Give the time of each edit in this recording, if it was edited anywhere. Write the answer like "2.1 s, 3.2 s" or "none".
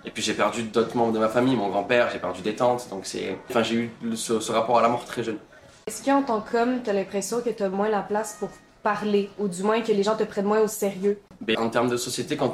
3.5 s, 11.5 s